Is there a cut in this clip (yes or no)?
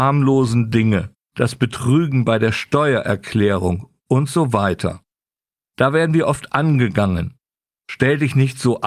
yes